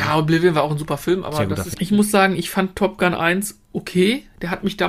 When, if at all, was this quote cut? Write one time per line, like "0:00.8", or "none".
0:01.7